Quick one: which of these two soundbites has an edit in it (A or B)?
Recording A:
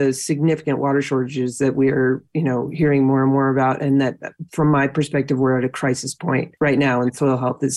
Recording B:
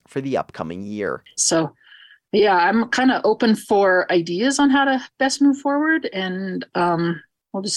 B